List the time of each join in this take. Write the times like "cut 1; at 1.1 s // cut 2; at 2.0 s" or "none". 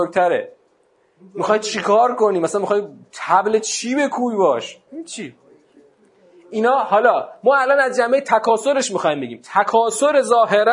none